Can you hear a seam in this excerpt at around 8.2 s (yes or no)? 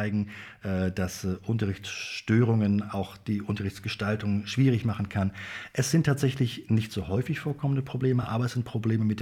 no